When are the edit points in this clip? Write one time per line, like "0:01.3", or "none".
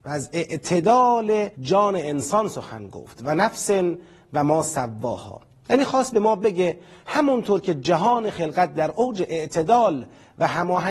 0:01.5